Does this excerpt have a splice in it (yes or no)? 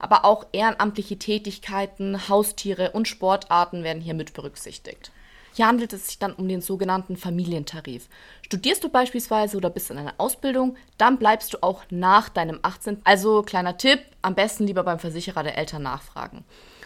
yes